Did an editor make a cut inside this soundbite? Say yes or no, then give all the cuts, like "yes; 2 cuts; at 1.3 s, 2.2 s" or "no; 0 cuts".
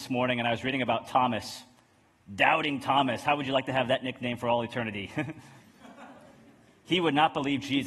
no; 0 cuts